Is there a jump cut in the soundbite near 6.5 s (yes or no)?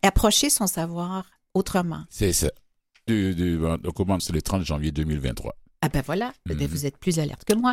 no